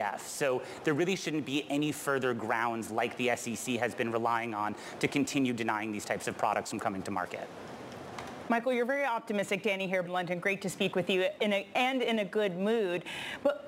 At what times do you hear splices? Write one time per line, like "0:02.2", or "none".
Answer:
0:10.1
0:11.4